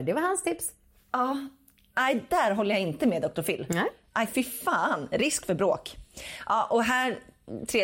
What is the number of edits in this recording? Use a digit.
0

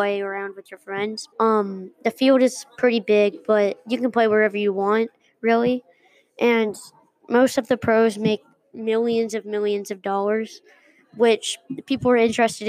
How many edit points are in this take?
1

